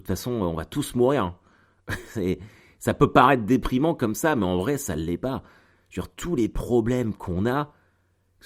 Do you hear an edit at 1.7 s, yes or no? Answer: no